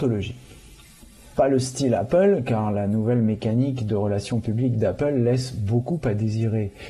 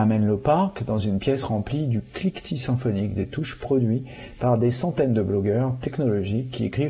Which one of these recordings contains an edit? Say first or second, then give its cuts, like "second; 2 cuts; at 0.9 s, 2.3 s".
first; 1 cut; at 1.3 s